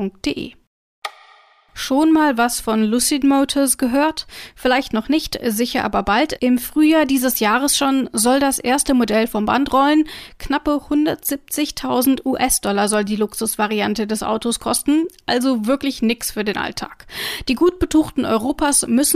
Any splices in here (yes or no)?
yes